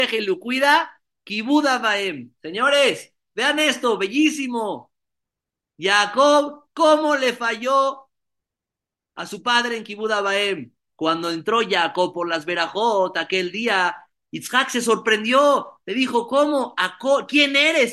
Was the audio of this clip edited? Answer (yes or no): no